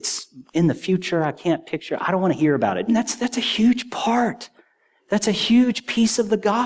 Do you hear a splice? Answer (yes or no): yes